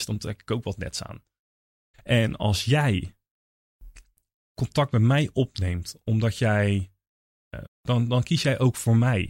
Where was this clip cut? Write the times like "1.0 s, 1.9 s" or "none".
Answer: 1.9 s, 7.7 s